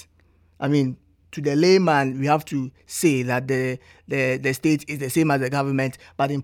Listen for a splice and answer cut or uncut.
uncut